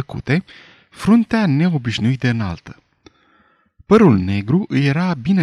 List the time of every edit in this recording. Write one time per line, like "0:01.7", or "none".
none